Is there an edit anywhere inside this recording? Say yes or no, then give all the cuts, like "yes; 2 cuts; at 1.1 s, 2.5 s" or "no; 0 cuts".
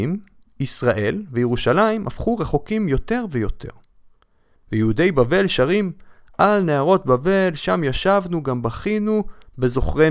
yes; 1 cut; at 4.6 s